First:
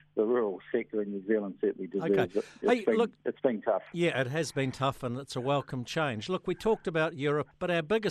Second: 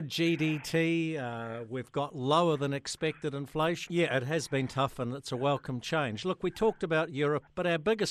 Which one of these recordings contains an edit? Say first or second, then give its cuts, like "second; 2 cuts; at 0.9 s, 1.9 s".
second; 1 cut; at 3.9 s